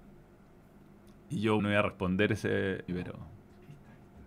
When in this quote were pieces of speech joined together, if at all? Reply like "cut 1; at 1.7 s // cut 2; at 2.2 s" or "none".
cut 1; at 1.6 s // cut 2; at 2.9 s